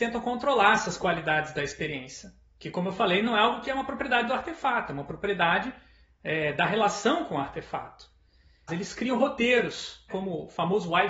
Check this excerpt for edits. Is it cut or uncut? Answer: cut